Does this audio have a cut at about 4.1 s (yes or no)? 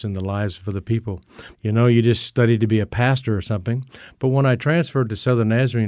no